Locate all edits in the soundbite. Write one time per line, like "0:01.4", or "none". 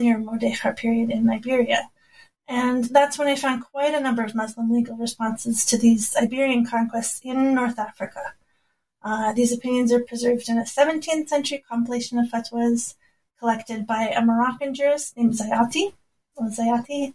none

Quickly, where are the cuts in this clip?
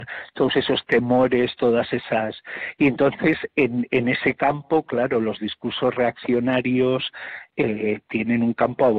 none

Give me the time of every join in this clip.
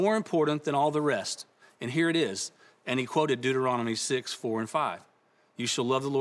none

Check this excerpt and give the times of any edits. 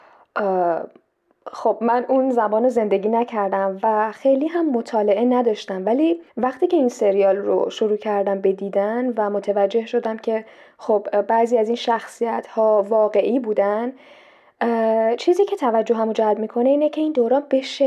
0:06.3

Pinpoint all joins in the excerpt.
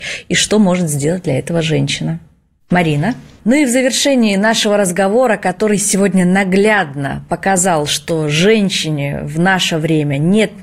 0:03.4

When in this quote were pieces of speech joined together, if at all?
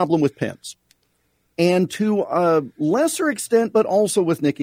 none

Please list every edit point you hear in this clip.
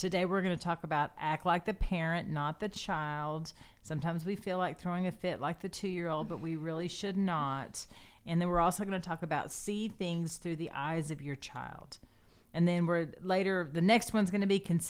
none

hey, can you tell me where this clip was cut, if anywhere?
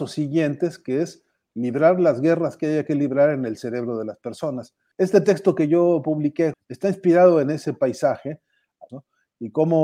0:04.9
0:06.5
0:08.9

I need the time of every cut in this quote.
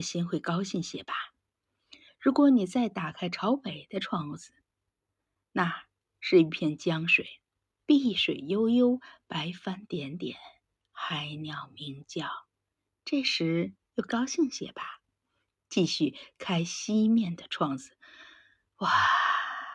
none

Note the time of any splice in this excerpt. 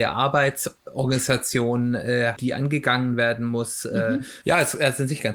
0:02.4
0:04.4

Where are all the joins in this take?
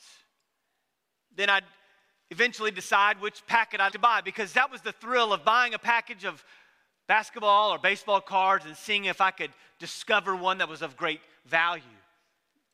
0:03.9

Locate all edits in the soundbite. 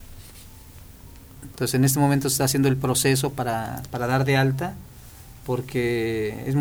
0:01.5

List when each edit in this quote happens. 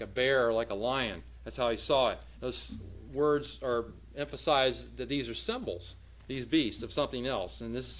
0:02.4

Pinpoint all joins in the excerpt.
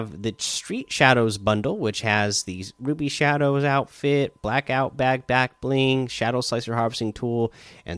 none

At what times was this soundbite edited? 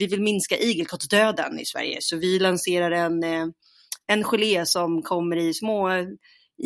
none

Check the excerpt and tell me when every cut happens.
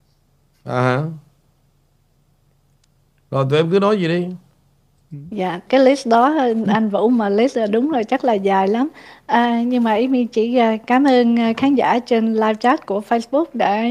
0:05.7
0:12.9

